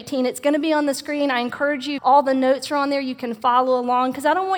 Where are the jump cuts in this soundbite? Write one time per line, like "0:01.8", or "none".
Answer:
0:02.0